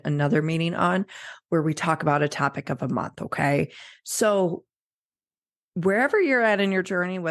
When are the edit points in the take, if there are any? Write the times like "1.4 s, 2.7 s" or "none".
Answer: none